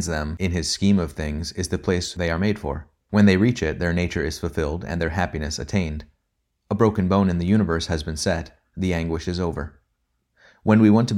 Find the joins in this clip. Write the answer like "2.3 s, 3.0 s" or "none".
none